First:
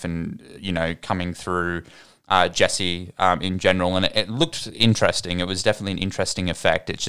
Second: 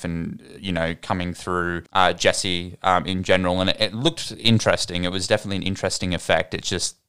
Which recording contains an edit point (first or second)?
second